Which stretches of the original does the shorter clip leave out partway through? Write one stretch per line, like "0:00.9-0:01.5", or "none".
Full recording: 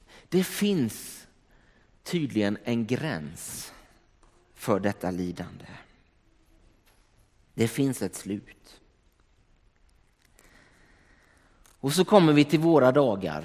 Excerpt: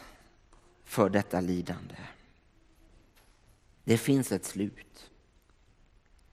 none